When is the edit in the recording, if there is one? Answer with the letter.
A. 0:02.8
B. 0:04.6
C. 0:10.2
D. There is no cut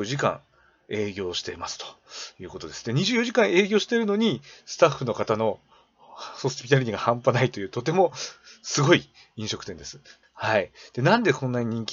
C